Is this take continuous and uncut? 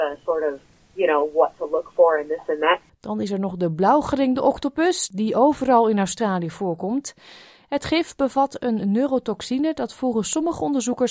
no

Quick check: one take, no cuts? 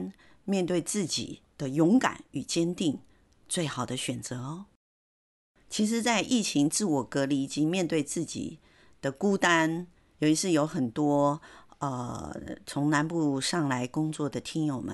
yes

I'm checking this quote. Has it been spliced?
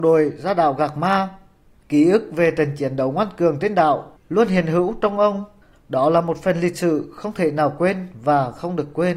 no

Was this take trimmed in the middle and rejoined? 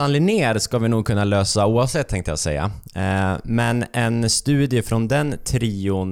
no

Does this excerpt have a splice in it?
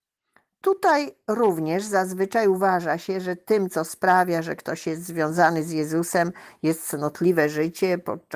no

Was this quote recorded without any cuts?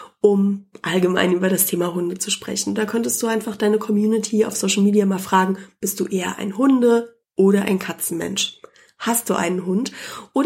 yes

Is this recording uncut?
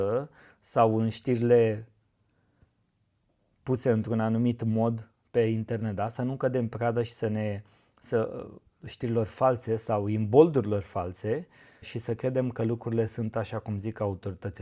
no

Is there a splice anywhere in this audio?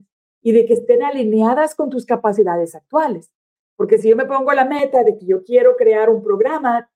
no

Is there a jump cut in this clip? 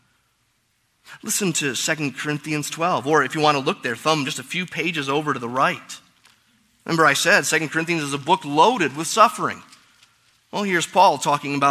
no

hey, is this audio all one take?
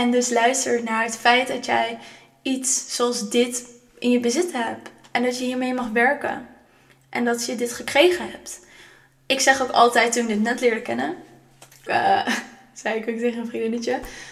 no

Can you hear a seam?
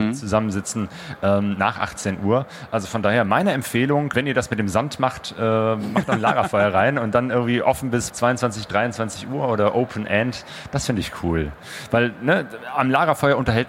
yes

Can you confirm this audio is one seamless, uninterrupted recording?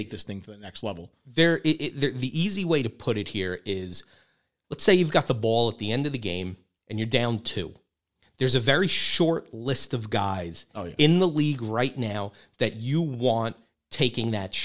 yes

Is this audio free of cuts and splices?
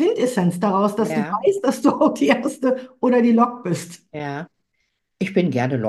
yes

